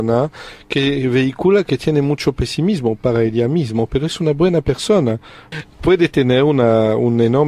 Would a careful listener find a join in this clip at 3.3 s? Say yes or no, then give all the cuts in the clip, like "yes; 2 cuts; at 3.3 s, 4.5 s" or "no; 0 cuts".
no; 1 cut; at 5.5 s